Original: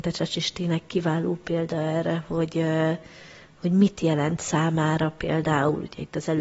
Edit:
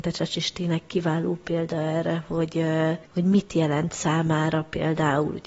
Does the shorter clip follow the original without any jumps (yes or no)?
no